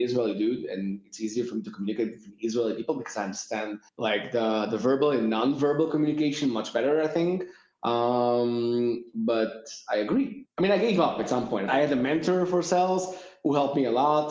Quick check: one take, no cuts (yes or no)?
no